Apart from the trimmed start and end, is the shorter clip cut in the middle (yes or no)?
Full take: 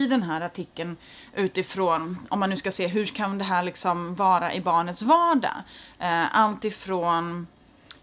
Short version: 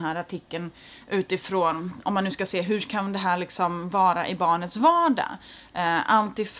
no